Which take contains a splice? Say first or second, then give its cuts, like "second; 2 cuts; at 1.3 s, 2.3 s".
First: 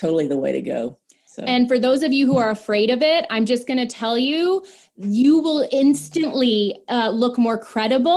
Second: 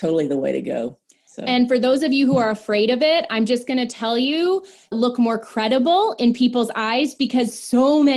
second; 1 cut; at 4.9 s